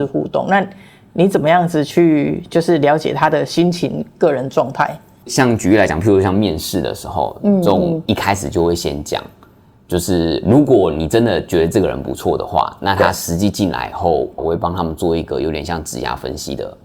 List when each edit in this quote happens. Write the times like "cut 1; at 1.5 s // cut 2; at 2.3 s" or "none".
cut 1; at 5.2 s // cut 2; at 14.4 s